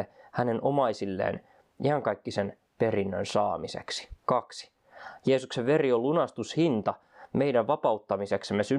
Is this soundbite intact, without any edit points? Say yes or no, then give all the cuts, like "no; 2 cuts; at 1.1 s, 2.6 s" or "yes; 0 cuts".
no; 1 cut; at 4.2 s